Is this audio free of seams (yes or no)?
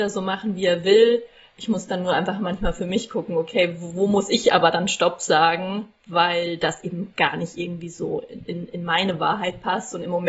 yes